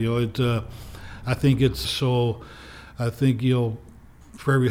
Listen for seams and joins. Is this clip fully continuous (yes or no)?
no